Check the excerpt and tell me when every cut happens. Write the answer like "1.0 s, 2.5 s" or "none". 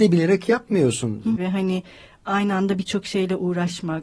1.4 s